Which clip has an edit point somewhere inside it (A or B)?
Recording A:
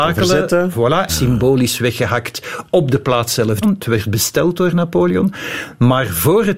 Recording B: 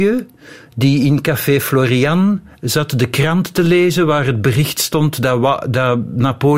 A